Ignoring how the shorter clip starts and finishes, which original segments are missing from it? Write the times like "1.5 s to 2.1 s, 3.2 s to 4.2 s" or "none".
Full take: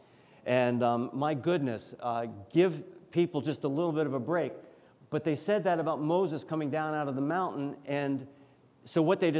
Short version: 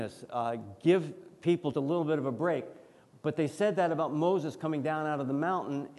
3.4 s to 3.6 s